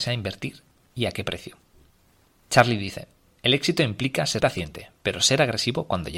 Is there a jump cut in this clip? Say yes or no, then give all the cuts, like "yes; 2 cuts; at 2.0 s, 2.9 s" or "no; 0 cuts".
yes; 1 cut; at 4.4 s